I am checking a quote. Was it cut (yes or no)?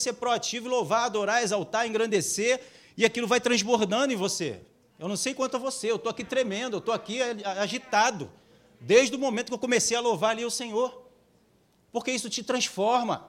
no